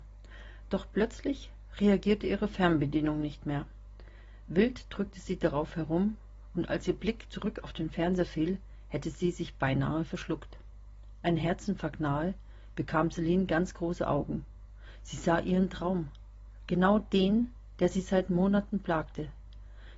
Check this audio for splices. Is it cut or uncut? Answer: uncut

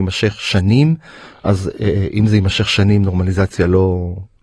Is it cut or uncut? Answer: uncut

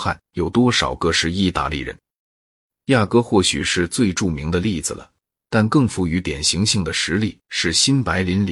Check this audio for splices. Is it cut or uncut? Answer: uncut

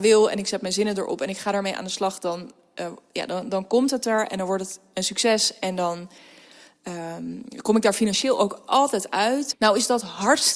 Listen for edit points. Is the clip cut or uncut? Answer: cut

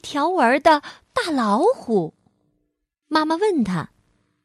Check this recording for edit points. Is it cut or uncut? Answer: cut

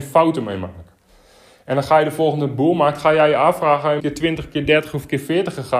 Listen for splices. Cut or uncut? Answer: cut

